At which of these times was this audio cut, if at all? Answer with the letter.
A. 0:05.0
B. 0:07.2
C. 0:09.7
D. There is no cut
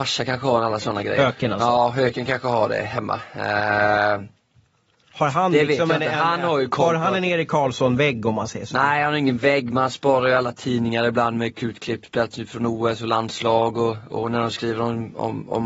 D